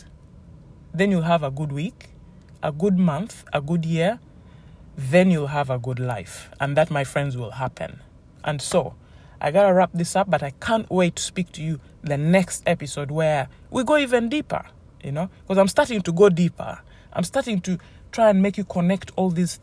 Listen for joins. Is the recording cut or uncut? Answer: uncut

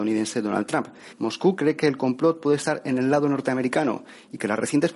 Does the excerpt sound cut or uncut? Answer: cut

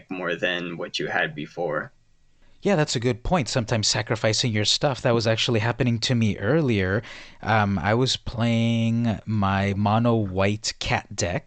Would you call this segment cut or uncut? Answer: uncut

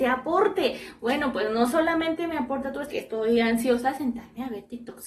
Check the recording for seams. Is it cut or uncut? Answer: cut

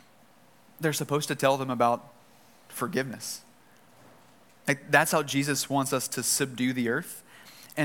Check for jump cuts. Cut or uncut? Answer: uncut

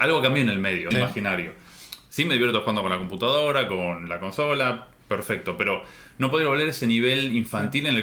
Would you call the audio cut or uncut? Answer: cut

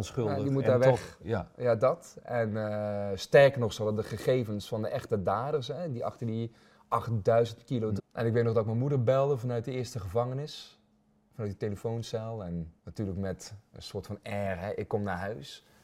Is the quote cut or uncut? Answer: cut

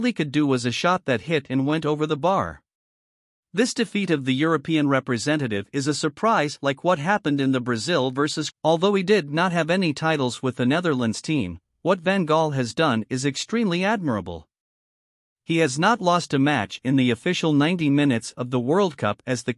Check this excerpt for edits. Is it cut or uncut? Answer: cut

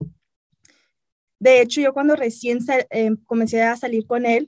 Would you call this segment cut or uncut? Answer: cut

